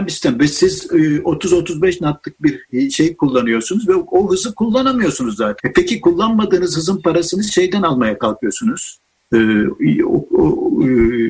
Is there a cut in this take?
yes; 1 cut; at 5.6 s

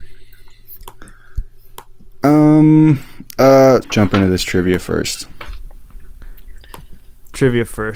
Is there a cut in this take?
yes; 1 cut; at 3.8 s

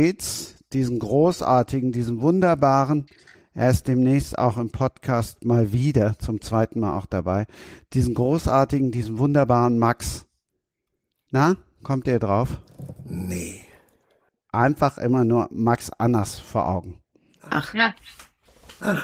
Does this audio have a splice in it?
no; 0 cuts

